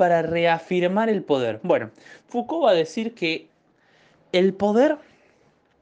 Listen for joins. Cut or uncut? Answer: uncut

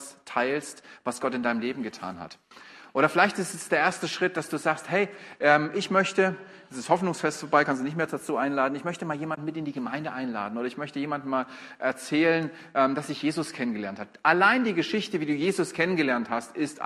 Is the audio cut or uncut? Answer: uncut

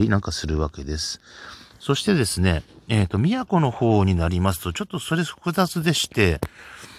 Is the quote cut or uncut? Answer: uncut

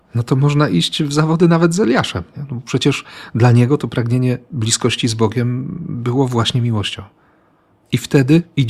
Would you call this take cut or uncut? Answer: uncut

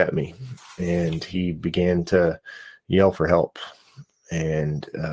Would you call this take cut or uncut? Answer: uncut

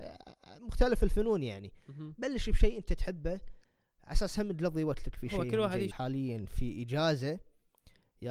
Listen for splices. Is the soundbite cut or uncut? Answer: cut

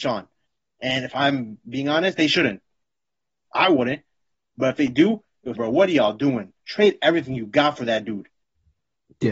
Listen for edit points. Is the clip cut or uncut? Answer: cut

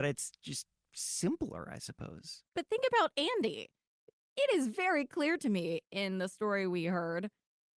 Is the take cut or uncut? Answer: uncut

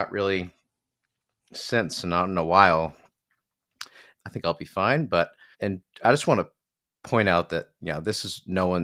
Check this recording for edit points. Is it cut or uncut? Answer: cut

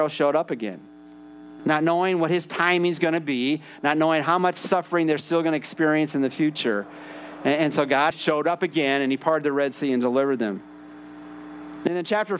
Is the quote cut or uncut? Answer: cut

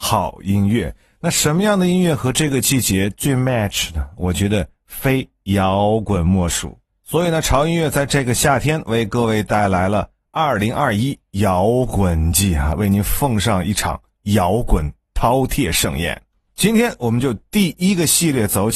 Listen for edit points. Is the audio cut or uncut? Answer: uncut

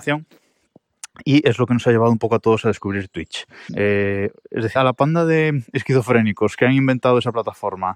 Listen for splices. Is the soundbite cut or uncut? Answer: cut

